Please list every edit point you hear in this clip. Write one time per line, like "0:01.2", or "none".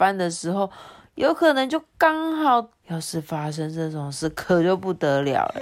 0:02.8